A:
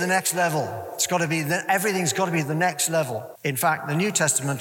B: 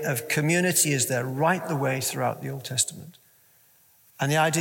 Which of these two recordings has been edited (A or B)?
A